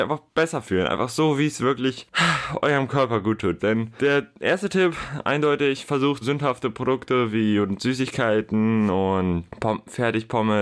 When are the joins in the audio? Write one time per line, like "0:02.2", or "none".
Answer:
0:03.6
0:06.2